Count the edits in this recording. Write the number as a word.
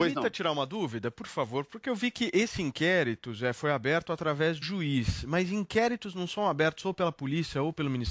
one